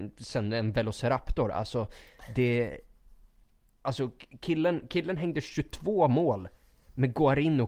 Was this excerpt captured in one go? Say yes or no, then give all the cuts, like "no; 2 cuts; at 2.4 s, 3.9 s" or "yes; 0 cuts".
yes; 0 cuts